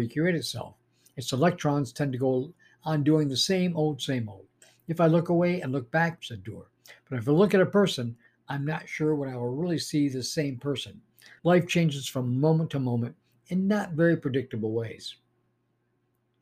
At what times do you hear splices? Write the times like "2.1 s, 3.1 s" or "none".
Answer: 6.2 s, 11.4 s